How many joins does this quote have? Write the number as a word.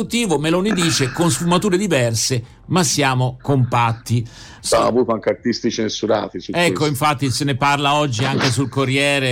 one